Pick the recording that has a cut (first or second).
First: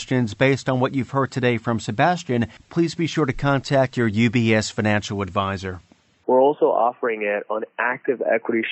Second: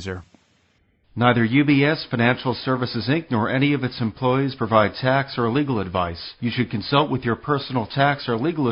first